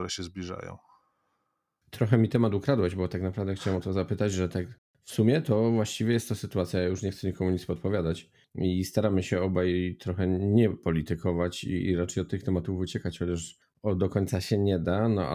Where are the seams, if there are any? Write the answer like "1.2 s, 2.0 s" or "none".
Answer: none

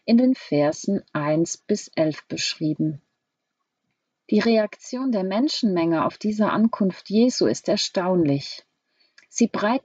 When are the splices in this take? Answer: none

